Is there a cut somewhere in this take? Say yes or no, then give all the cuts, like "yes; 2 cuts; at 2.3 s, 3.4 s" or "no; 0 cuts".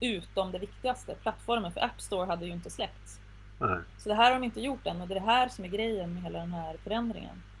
no; 0 cuts